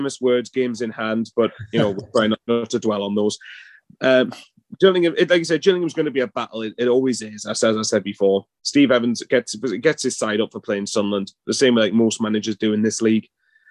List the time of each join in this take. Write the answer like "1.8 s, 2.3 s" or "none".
2.5 s